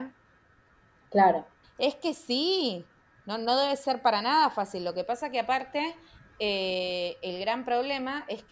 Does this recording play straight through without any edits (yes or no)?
no